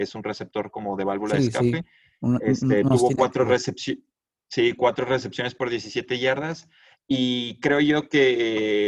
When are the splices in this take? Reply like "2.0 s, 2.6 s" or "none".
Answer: none